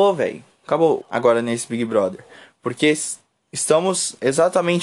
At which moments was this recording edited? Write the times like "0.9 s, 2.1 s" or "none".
1.0 s